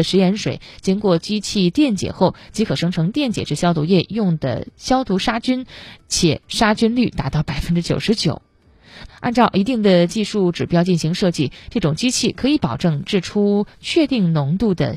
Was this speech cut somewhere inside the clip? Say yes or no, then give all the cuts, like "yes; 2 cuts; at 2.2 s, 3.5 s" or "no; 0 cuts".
yes; 1 cut; at 9.1 s